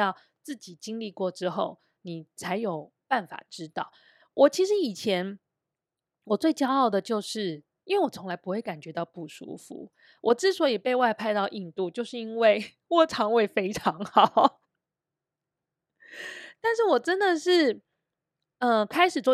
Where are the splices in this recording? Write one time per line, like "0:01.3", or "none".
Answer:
0:07.8